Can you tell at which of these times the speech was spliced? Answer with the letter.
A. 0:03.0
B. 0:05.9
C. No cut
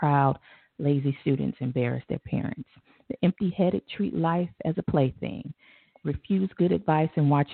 B